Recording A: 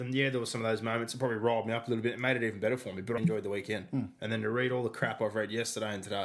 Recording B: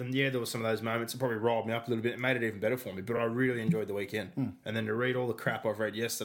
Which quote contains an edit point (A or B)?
A